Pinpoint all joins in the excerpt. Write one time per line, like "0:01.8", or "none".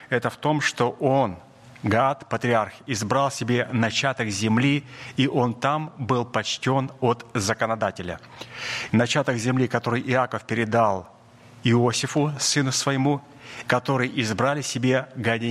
0:08.9
0:13.6